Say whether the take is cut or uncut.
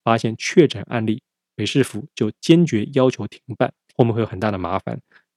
cut